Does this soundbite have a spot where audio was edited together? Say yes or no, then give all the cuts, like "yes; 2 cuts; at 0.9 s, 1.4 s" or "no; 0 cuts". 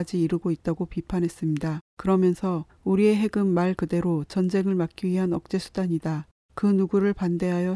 no; 0 cuts